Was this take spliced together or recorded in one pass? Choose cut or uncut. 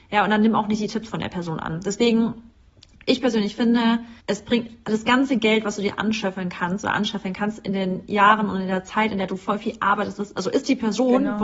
cut